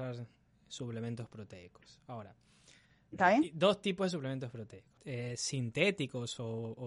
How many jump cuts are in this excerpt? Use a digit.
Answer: 1